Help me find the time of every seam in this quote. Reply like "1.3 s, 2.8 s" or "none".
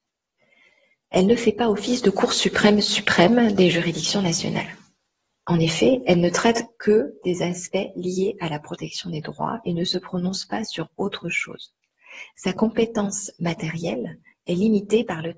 none